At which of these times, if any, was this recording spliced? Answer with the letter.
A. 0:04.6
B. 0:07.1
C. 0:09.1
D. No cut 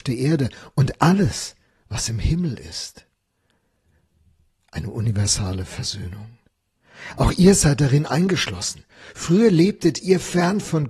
D